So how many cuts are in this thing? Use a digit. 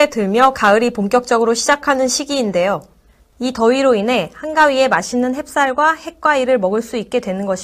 1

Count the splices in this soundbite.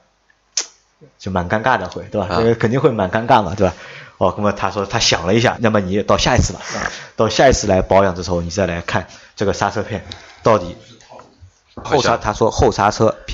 2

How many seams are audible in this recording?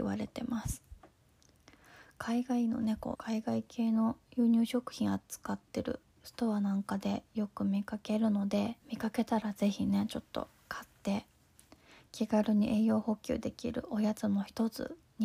2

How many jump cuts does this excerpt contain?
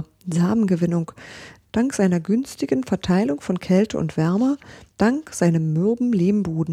2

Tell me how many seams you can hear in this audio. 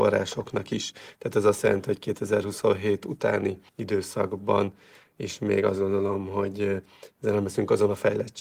1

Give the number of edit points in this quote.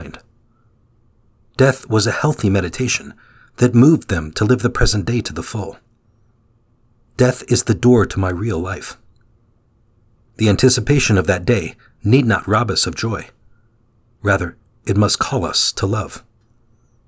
0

